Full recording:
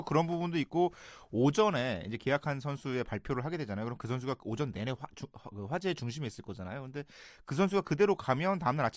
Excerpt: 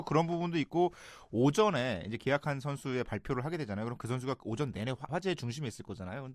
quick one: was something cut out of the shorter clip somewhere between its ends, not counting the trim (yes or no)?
yes